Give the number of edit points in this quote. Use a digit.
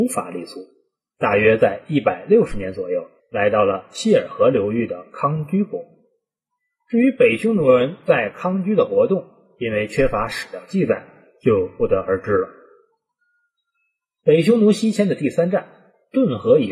1